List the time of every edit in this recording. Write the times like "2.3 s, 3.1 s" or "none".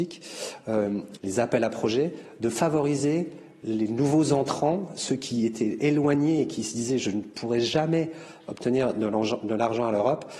1.2 s